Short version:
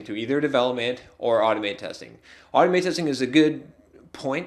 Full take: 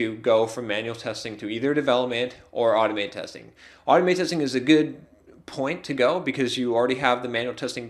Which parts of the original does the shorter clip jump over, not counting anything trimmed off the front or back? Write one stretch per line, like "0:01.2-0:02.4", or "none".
none